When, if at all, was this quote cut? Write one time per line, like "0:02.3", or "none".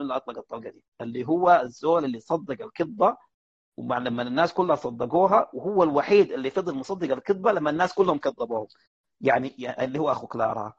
0:00.9